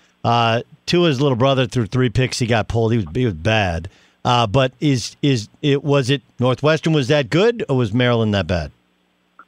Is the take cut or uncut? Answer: uncut